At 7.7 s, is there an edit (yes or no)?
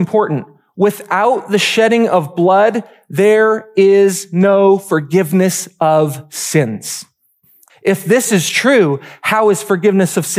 yes